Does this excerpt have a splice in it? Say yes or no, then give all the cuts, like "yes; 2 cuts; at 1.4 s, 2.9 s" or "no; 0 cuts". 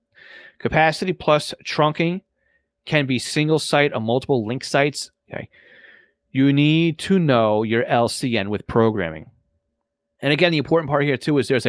yes; 1 cut; at 5.2 s